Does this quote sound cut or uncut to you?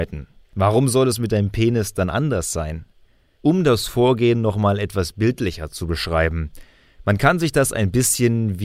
uncut